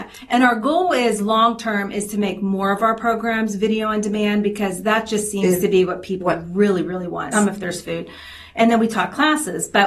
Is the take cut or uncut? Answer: cut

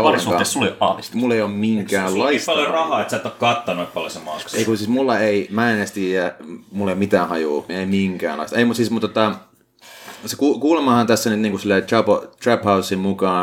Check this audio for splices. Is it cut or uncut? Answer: cut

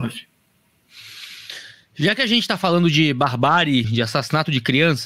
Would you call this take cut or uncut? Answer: cut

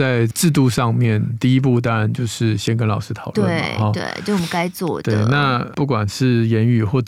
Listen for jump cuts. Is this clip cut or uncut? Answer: uncut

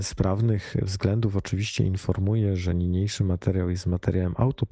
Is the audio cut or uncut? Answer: uncut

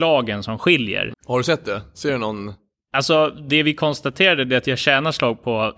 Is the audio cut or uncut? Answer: cut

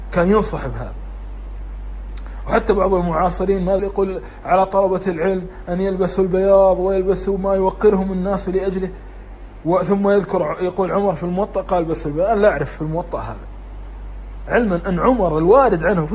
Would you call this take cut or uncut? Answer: cut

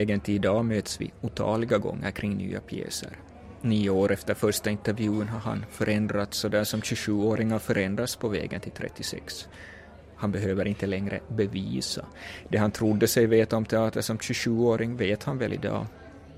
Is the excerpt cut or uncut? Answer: uncut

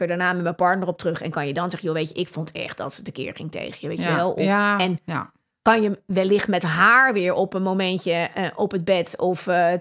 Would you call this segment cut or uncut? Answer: uncut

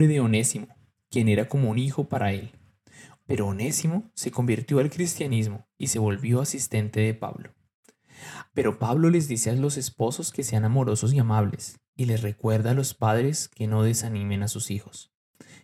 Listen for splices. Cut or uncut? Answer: cut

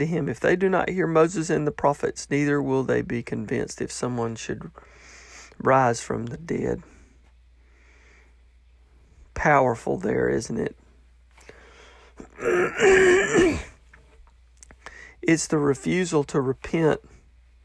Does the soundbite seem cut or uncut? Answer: uncut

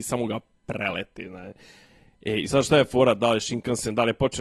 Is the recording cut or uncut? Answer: uncut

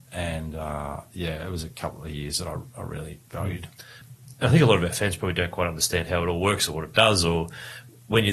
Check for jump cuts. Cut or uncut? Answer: uncut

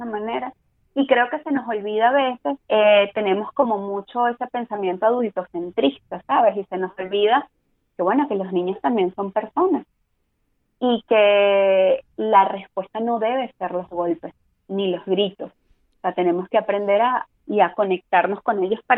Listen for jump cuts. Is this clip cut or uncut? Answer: cut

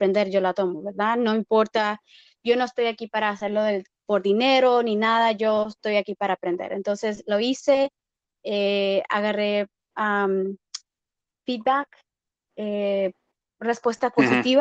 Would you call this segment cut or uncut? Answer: uncut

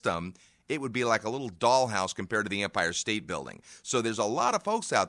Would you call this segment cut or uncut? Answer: uncut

